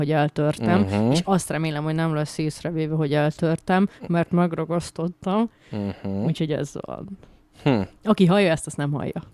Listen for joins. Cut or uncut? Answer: uncut